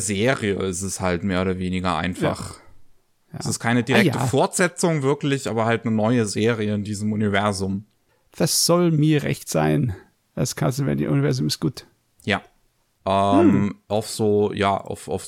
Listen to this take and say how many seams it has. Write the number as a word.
one